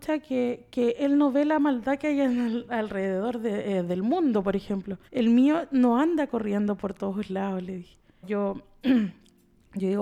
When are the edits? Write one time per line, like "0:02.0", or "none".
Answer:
0:05.1
0:08.2